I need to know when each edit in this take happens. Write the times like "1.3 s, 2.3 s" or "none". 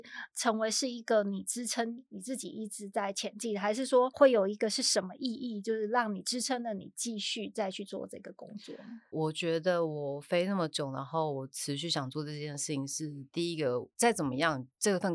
none